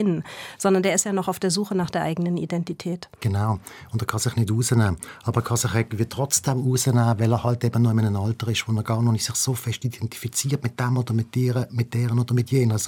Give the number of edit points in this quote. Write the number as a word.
zero